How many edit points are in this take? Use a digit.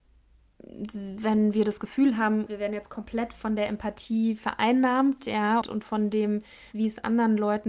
3